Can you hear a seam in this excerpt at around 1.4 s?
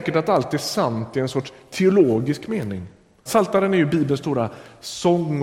no; 1 cut; at 3.3 s

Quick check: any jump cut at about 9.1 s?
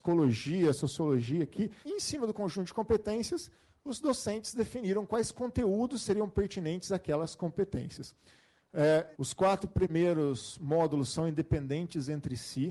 yes; 2 cuts; at 1.8 s, 9.1 s

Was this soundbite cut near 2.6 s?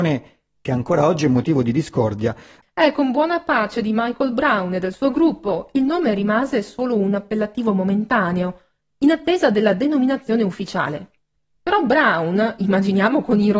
yes; 1 cut; at 2.6 s

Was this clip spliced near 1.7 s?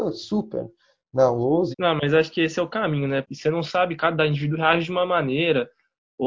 yes; 2 cuts; at 1.7 s, 3.2 s

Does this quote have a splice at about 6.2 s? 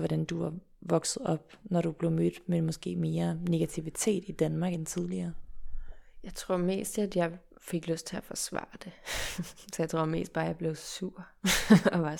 no; 0 cuts

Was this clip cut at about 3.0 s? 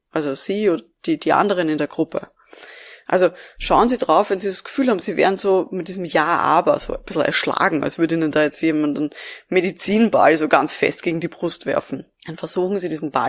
no; 1 cut; at 12.1 s

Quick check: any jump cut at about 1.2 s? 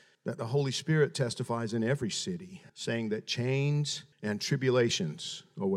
no; 2 cuts; at 2.7 s, 4.1 s

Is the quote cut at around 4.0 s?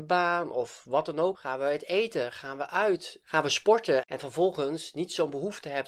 yes; 2 cuts; at 1.3 s, 4.0 s

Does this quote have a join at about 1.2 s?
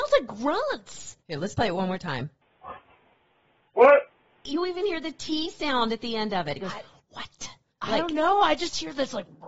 no; 0 cuts

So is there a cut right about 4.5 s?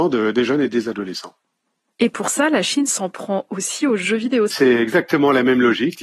yes; 1 cut; at 4.5 s

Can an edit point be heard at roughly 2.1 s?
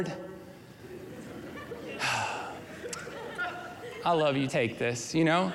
no; 1 cut; at 4.5 s

